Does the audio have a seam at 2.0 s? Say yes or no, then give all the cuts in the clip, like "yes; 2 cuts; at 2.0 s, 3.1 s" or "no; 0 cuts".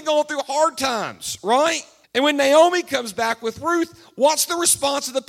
yes; 1 cut; at 2.0 s